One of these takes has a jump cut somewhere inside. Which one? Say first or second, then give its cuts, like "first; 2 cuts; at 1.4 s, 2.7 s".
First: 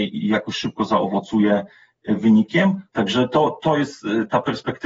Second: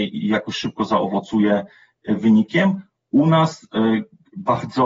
first; 1 cut; at 2.9 s